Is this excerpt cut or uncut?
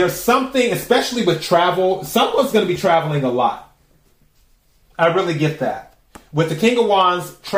uncut